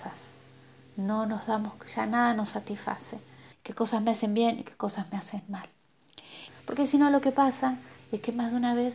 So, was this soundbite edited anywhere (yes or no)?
yes